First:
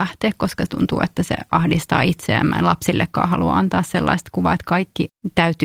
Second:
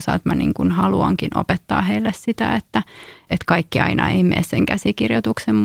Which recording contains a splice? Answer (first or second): second